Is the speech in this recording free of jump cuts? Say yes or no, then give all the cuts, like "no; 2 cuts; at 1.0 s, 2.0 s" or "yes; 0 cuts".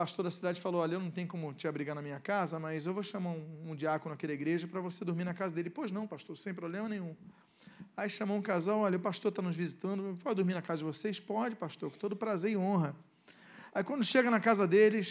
no; 1 cut; at 13.7 s